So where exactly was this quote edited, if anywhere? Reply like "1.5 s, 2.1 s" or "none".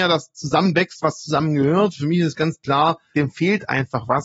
3.1 s